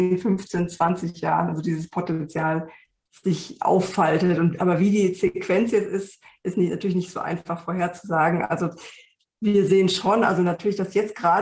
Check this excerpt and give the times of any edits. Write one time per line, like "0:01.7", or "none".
none